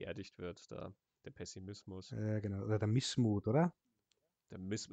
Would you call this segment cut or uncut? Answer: uncut